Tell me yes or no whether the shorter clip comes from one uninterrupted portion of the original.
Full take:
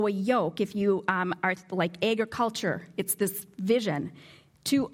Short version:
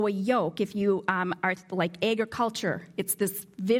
yes